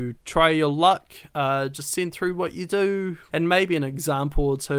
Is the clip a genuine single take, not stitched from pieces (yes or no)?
no